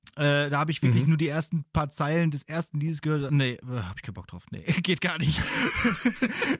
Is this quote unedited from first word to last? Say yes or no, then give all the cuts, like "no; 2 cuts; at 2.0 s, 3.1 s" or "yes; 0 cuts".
yes; 0 cuts